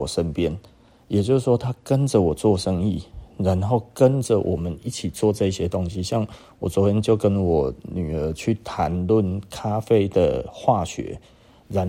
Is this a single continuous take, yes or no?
yes